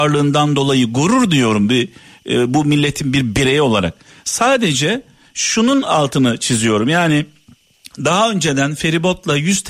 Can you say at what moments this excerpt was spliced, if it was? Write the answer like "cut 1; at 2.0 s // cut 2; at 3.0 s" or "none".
none